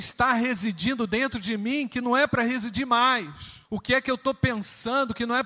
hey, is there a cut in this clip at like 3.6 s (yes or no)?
yes